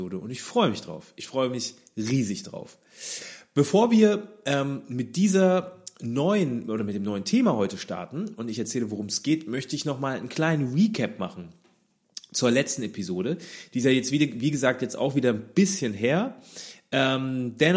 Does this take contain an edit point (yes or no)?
no